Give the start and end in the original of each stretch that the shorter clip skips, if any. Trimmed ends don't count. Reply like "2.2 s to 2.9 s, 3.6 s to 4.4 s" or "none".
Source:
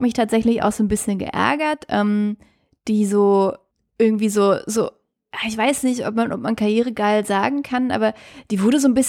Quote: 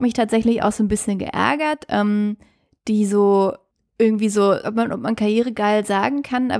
4.6 s to 6.0 s